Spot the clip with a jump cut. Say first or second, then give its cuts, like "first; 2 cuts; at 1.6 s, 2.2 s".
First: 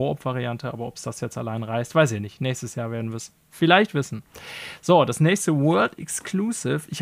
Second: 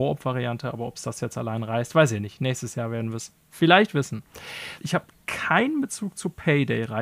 second; 1 cut; at 4.8 s